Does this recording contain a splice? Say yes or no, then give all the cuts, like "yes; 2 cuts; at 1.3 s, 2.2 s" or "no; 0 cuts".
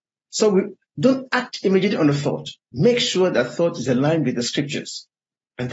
no; 0 cuts